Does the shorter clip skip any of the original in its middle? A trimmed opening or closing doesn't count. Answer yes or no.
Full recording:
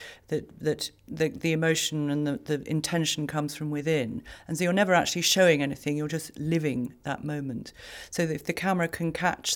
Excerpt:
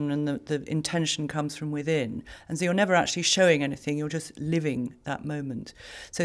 no